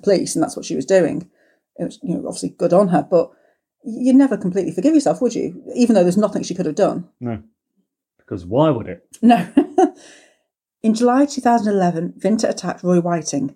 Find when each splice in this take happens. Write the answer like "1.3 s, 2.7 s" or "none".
8.1 s